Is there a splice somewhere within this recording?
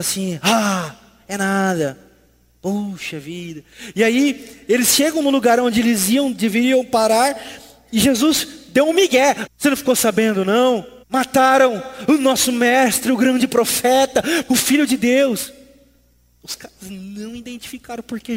yes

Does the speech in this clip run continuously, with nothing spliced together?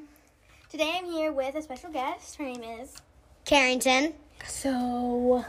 no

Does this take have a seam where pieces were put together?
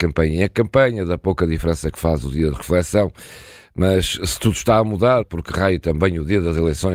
yes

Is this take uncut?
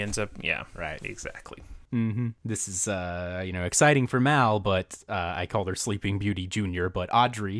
yes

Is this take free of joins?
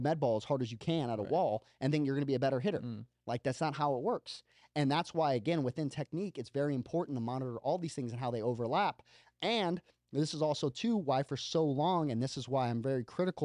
yes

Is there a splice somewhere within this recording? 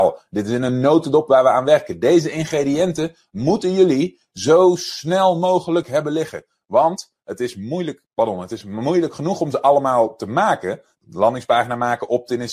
yes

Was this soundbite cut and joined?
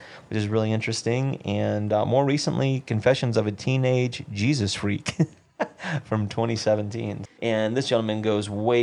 yes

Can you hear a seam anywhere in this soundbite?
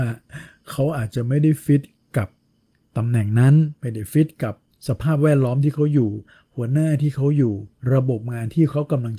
no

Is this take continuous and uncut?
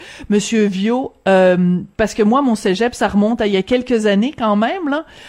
yes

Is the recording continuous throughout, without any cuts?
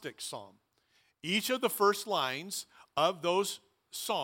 yes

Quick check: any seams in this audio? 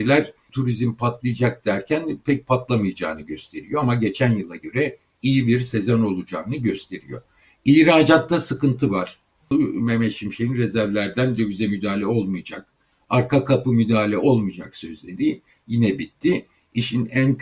yes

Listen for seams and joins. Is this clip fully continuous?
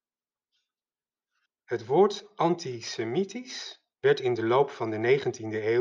no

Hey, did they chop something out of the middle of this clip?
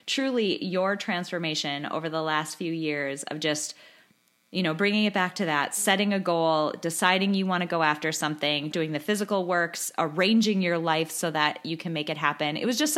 yes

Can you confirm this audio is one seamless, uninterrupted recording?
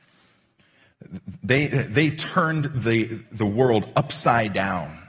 yes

